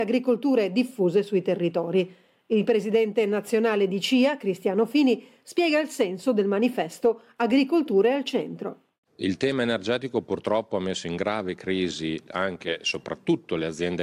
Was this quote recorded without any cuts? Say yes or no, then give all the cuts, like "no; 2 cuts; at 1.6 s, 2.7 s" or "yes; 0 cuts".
no; 1 cut; at 9.0 s